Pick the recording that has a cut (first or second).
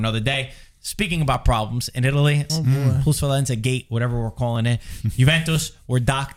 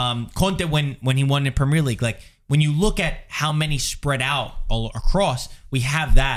first